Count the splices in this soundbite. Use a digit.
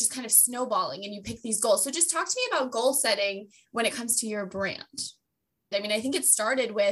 1